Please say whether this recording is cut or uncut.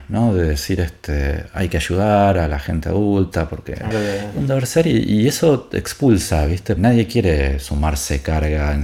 cut